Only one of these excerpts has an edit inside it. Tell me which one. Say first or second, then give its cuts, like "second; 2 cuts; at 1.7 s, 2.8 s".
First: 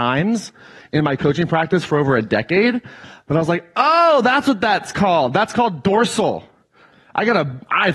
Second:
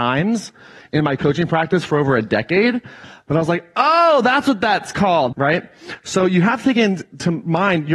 second; 1 cut; at 5.3 s